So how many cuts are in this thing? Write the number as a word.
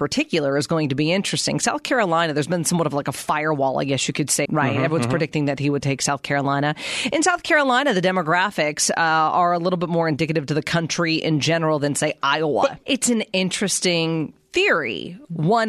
two